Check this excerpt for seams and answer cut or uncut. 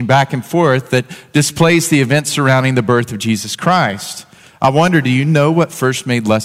uncut